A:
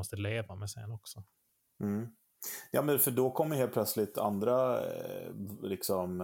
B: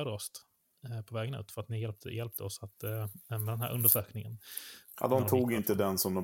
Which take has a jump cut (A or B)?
B